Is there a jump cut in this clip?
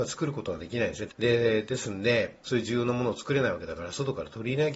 yes; 2 cuts; at 1.1 s, 2.4 s

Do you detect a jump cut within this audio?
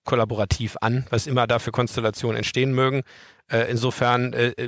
no; 0 cuts

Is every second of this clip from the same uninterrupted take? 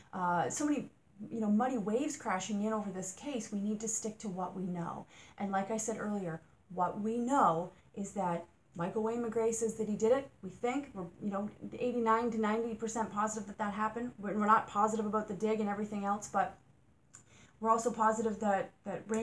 yes; 0 cuts

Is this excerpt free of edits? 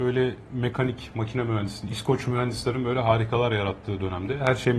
yes; 0 cuts

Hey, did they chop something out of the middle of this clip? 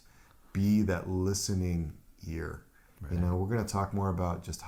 no; 0 cuts

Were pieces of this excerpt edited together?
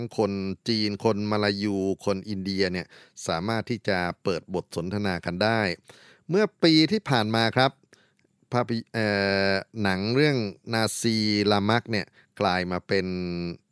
yes; 1 cut; at 10.6 s

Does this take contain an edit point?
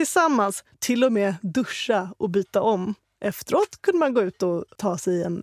no; 0 cuts

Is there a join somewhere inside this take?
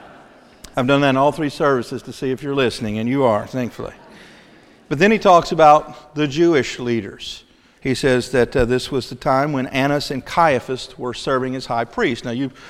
yes; 1 cut; at 7.8 s

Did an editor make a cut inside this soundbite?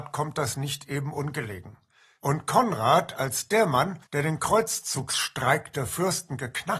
yes; 2 cuts; at 2.2 s, 4.1 s

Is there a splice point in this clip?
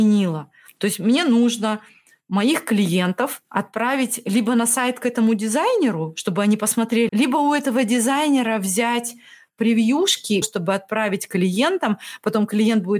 yes; 3 cuts; at 3.4 s, 7.1 s, 10.4 s

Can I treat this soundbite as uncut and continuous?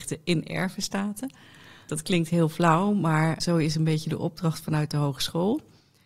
no; 2 cuts; at 1.9 s, 3.4 s

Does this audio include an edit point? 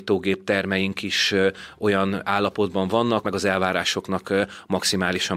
yes; 1 cut; at 3.2 s

